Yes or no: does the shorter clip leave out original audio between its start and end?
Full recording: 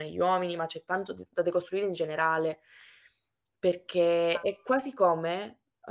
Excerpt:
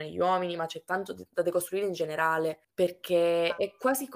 yes